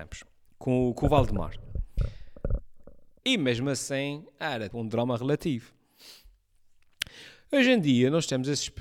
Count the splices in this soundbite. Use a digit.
2